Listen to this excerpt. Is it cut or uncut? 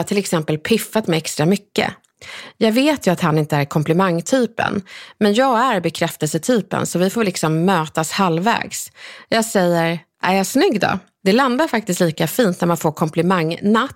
cut